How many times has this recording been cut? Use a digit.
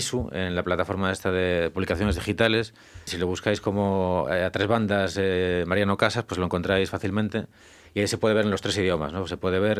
1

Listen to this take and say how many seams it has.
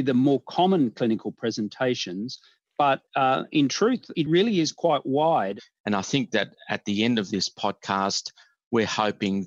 0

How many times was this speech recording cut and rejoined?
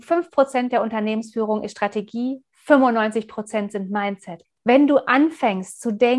1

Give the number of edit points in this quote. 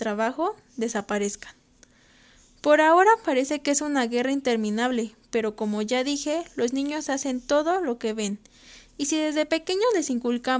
0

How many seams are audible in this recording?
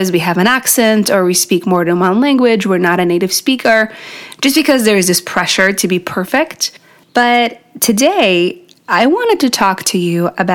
1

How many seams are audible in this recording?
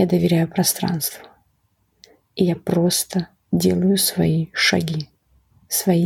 0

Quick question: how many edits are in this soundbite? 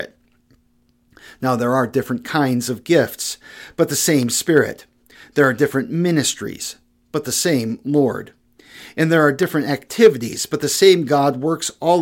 0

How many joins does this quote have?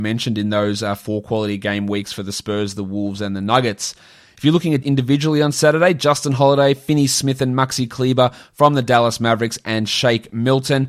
1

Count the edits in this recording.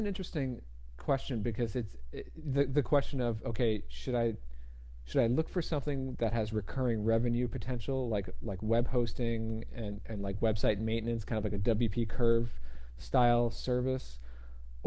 0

